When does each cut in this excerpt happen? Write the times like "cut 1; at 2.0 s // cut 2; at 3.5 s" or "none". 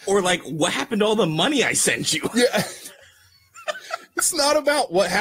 none